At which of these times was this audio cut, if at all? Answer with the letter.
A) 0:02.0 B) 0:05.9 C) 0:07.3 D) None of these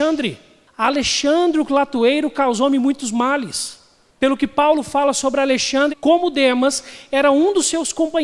B